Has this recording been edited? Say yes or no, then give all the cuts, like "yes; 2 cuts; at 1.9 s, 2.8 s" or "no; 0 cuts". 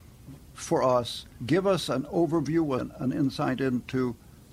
yes; 2 cuts; at 1.3 s, 2.8 s